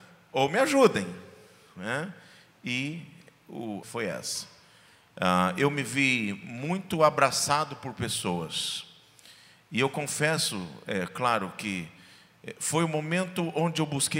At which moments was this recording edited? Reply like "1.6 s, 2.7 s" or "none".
3.8 s